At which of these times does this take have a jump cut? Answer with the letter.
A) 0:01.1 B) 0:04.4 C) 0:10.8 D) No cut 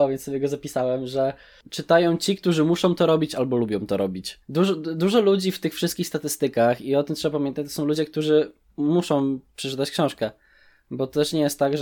B